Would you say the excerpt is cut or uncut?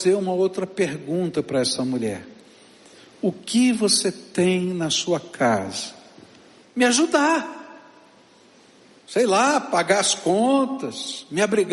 cut